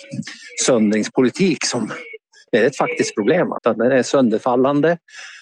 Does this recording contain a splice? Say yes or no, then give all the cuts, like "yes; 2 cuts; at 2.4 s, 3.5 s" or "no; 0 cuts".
yes; 2 cuts; at 2.5 s, 3.6 s